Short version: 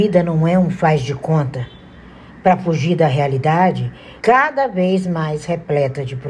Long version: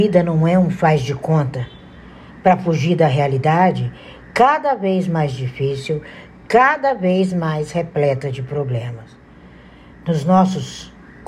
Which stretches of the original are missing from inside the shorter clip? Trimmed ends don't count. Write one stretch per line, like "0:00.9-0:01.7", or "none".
0:04.2-0:06.5